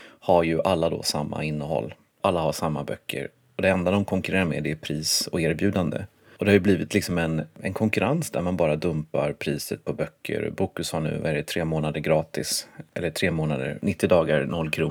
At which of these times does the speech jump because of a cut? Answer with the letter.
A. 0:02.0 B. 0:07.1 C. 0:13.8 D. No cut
D